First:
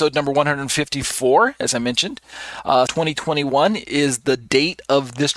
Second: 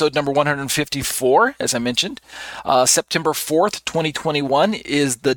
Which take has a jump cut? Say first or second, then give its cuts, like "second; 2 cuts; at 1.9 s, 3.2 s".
first; 1 cut; at 2.9 s